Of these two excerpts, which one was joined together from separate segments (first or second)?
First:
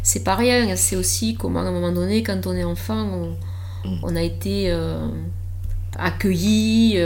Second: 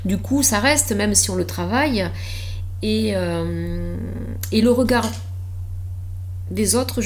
first